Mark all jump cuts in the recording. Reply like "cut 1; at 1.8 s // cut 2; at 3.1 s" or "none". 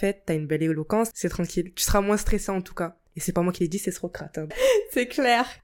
cut 1; at 1.1 s // cut 2; at 4.5 s

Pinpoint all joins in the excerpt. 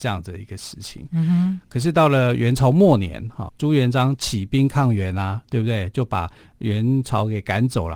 cut 1; at 3.5 s

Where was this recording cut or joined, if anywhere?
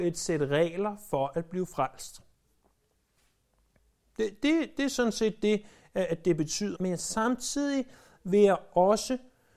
cut 1; at 6.7 s

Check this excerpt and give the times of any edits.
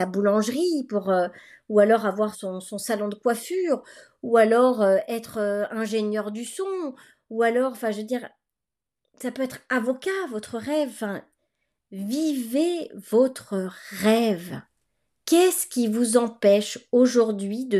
cut 1; at 2.3 s

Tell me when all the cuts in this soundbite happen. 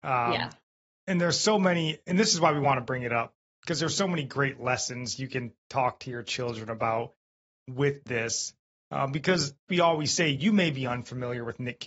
cut 1; at 9.7 s

